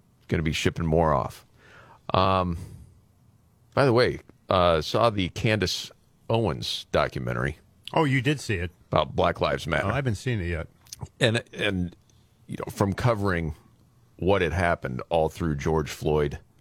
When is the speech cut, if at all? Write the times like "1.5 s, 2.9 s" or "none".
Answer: none